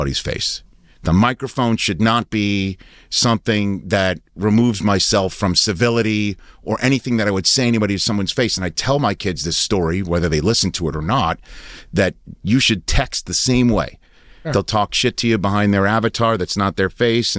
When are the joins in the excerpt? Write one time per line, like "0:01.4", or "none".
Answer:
0:14.4